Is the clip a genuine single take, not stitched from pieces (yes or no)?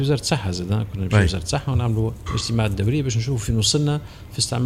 yes